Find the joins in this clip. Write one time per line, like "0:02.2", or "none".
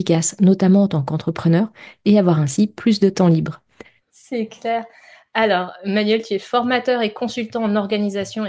0:04.0